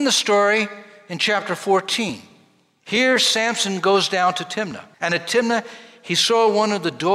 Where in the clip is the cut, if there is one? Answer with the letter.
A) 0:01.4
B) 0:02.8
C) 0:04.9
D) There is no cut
C